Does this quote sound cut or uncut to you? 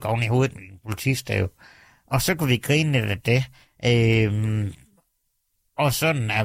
uncut